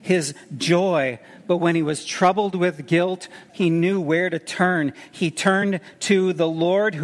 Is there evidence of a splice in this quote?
yes; 1 cut; at 3.5 s

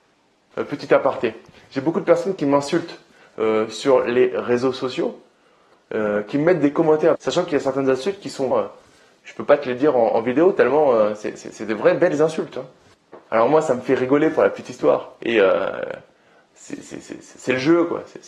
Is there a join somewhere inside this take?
yes; 2 cuts; at 7.1 s, 8.5 s

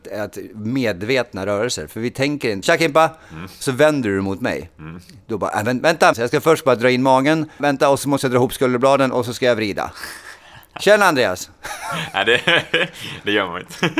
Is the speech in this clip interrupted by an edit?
yes; 3 cuts; at 2.6 s, 6.1 s, 7.6 s

